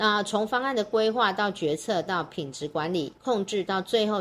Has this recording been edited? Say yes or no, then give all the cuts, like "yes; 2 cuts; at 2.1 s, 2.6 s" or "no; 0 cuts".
yes; 1 cut; at 3.2 s